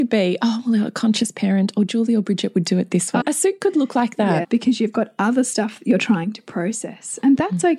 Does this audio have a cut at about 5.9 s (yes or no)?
no